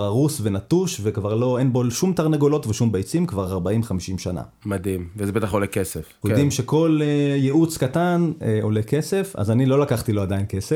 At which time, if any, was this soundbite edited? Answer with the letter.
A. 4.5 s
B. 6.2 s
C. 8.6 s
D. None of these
B